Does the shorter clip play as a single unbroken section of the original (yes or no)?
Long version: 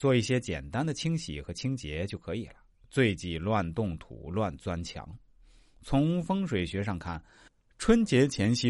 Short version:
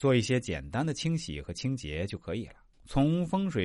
no